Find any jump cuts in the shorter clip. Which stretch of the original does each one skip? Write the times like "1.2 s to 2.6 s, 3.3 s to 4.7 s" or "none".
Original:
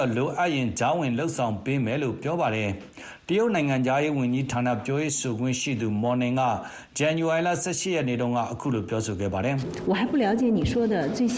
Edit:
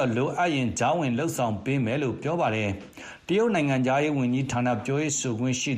none